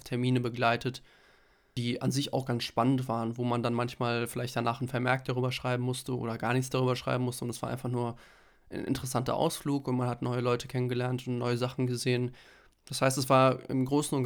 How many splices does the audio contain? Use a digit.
0